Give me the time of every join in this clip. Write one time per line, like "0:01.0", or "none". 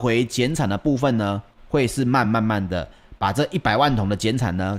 0:02.2